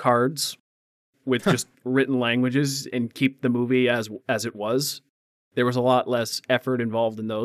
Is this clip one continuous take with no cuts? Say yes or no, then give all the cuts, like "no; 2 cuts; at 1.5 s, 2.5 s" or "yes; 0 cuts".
yes; 0 cuts